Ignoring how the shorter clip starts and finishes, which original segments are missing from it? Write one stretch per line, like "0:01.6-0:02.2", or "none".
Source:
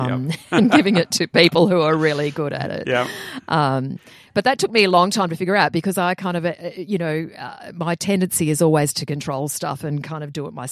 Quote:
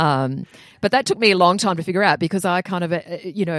none